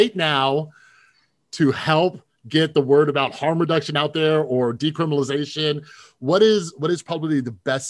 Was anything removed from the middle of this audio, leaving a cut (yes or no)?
no